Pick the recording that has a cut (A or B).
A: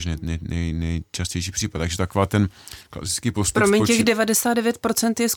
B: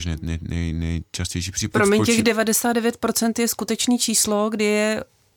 B